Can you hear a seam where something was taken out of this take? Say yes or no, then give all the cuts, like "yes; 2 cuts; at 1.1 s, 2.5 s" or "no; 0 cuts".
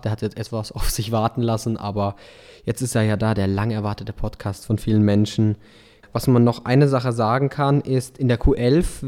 yes; 1 cut; at 6.0 s